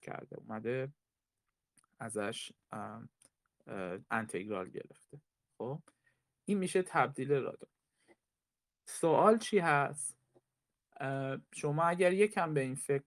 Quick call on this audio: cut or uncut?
uncut